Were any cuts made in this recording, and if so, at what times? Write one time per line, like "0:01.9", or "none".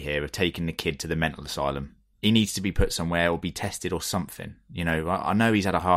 0:02.1